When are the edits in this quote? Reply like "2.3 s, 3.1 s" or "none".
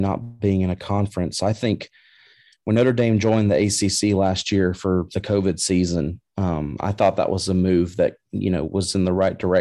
none